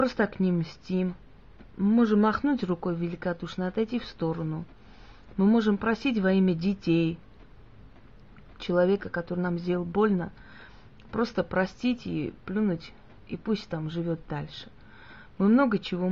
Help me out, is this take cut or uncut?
uncut